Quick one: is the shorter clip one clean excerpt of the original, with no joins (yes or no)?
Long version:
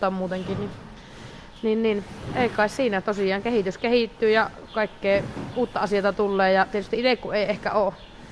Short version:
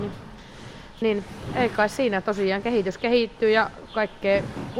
no